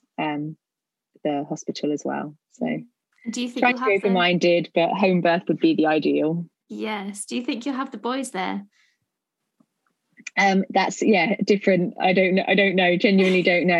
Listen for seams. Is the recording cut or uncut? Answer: uncut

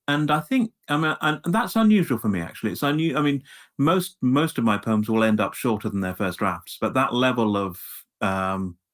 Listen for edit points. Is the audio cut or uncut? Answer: uncut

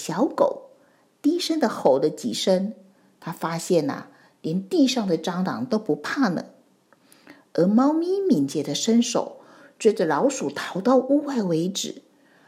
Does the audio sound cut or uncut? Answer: uncut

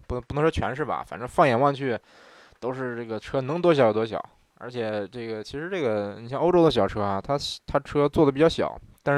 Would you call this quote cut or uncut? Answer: uncut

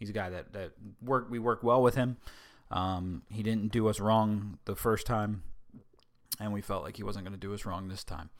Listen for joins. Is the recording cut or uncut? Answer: uncut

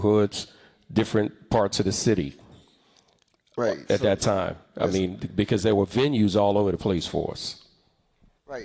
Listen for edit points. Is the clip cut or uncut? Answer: uncut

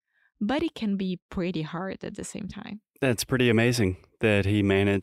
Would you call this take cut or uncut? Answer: uncut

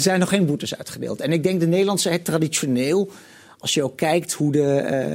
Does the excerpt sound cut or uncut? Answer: uncut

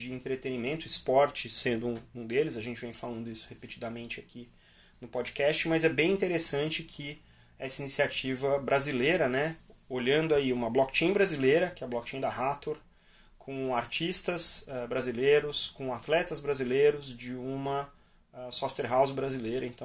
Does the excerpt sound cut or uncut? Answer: uncut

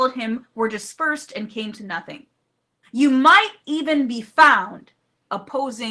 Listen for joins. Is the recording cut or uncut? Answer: cut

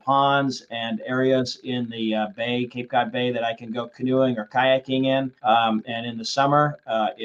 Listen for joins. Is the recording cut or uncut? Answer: cut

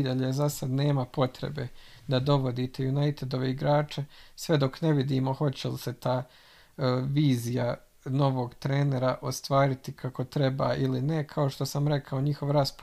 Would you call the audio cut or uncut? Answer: uncut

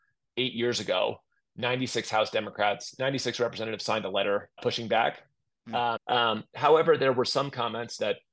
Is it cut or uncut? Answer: cut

